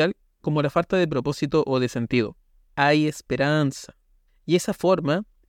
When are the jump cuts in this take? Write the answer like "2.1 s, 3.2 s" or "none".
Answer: 2.7 s, 4.3 s